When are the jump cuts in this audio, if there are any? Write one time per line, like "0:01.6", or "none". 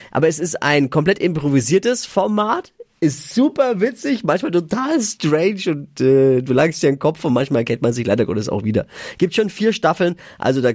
none